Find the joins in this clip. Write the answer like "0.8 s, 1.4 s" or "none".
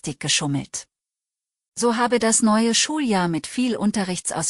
1.7 s